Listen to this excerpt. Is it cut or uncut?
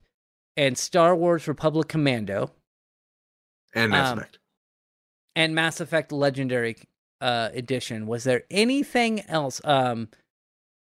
uncut